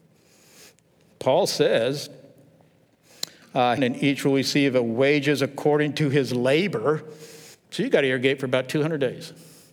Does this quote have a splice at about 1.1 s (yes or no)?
no